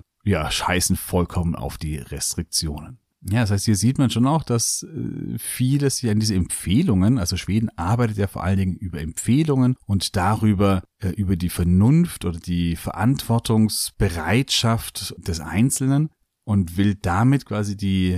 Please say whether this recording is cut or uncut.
uncut